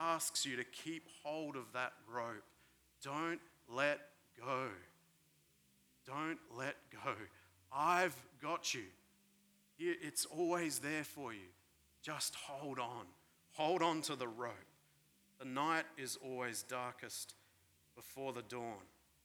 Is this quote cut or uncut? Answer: uncut